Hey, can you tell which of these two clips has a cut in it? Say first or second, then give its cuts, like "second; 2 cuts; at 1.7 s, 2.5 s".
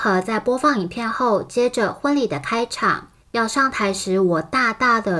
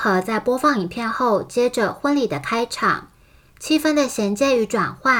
first; 1 cut; at 3.2 s